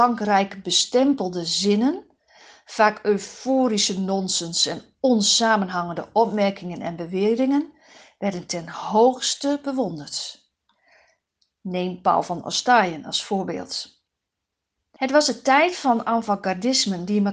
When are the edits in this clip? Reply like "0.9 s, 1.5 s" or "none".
15.0 s